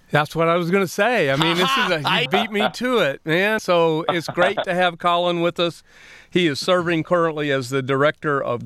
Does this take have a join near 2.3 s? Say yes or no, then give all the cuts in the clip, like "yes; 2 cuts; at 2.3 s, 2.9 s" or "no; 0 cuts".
yes; 2 cuts; at 2.3 s, 3.6 s